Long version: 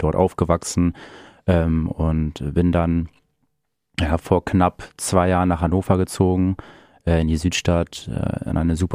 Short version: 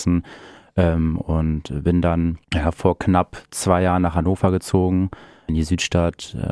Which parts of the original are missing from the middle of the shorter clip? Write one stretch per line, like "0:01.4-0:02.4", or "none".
0:03.1-0:03.9
0:06.9-0:07.2